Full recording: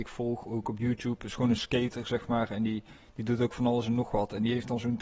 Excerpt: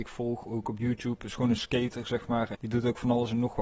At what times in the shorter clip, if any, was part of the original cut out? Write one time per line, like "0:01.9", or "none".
0:02.5